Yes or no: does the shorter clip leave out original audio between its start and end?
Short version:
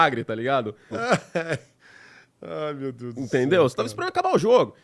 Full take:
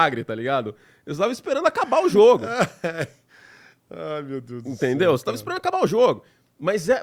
yes